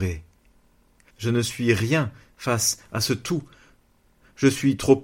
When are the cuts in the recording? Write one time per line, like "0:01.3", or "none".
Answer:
0:01.1

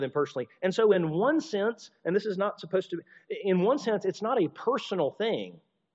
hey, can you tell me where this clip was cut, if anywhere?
none

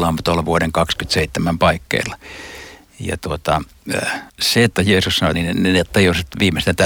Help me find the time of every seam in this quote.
0:04.3
0:05.3

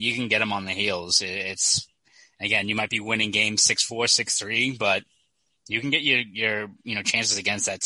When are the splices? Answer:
none

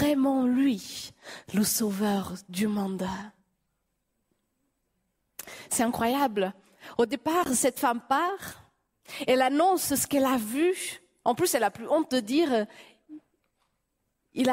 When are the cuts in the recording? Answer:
none

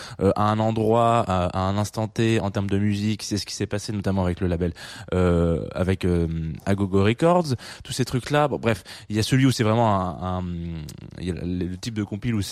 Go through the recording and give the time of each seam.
none

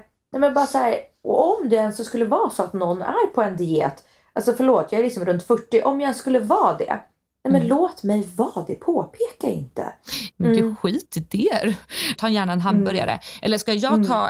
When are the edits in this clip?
0:10.3
0:12.2

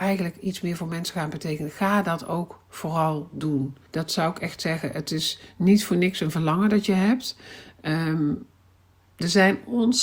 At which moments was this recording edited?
0:03.9

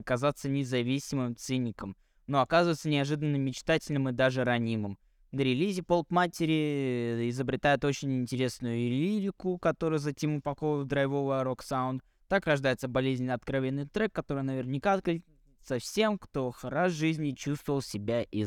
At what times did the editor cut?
none

